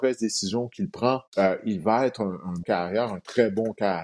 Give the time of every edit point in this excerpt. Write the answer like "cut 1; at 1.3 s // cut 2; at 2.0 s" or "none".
cut 1; at 1.3 s // cut 2; at 2.6 s